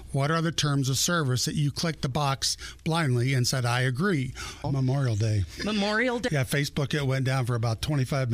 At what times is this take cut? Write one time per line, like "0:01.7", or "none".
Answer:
0:04.6
0:06.3